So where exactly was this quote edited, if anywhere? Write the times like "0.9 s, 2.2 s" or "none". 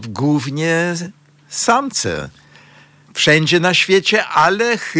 3.1 s